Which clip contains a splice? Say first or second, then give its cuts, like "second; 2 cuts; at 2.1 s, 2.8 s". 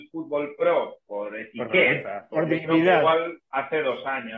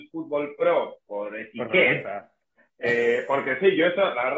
first; 1 cut; at 2.3 s